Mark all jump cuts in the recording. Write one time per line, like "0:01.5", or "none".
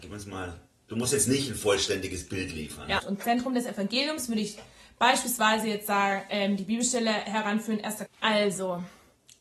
0:03.0
0:08.1

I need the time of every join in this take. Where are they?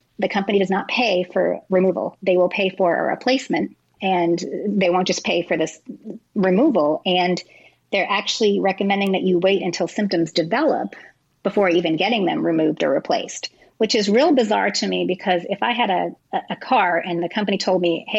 none

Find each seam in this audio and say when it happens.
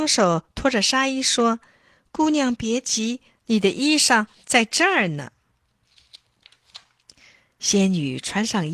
none

